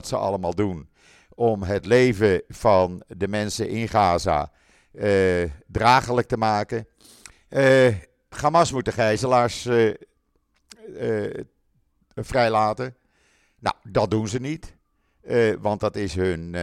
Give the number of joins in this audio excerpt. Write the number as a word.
one